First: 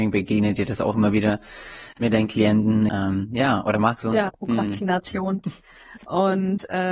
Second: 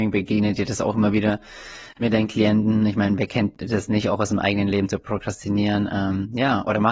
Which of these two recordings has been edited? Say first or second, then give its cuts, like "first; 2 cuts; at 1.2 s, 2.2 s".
first; 3 cuts; at 2.9 s, 4.3 s, 5.4 s